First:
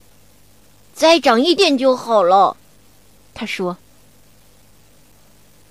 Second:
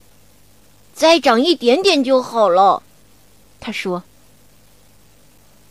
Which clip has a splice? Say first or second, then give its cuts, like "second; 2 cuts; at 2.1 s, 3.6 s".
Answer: first; 1 cut; at 1.6 s